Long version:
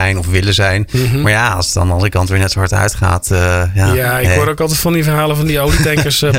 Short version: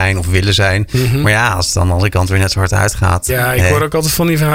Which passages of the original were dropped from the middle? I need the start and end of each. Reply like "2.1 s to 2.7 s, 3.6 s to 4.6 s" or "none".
3.3 s to 3.9 s